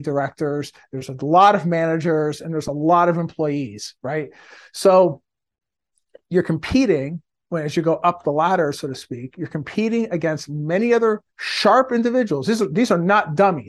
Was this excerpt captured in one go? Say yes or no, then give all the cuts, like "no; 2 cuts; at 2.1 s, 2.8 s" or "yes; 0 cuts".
yes; 0 cuts